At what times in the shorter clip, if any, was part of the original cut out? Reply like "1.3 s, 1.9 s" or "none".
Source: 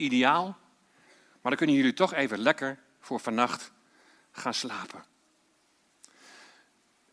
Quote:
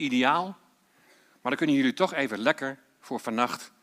none